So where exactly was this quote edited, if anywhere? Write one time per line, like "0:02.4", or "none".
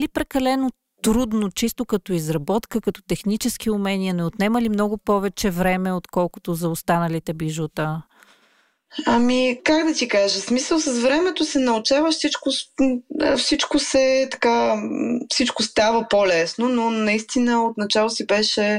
0:09.6